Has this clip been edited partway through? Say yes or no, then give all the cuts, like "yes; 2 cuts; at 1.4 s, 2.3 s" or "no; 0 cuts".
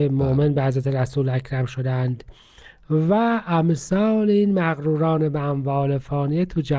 no; 0 cuts